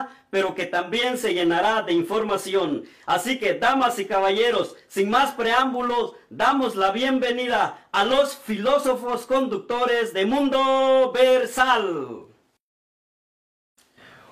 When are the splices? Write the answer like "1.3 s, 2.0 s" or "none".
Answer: none